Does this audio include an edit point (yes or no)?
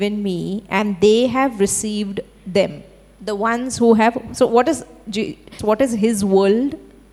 yes